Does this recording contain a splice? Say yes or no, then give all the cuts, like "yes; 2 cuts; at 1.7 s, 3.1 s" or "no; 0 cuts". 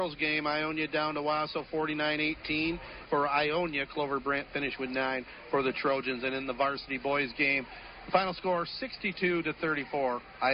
yes; 1 cut; at 3.0 s